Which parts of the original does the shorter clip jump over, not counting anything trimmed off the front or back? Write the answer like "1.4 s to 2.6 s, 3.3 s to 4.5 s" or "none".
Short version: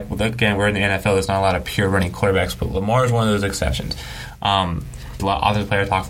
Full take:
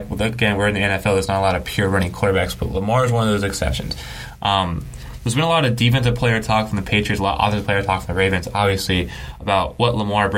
5.2 s to 7.2 s